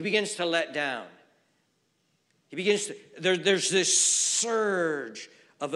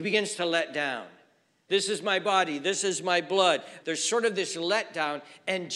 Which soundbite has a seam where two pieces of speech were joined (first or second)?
second